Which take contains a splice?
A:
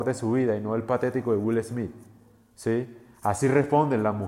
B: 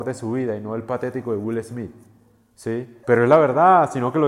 B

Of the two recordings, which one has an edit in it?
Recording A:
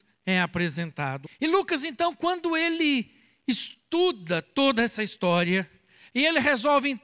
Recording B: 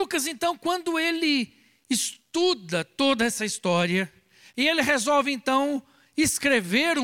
A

